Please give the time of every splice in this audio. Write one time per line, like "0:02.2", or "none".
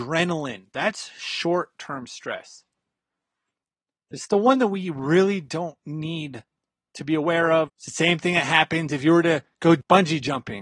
0:07.7